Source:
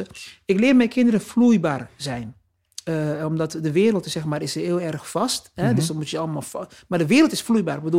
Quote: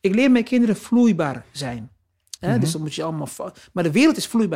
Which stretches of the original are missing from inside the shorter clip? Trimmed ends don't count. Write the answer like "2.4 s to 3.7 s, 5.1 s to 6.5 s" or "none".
2.8 s to 5.5 s